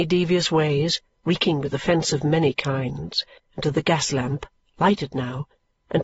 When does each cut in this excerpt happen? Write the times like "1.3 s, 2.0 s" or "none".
3.4 s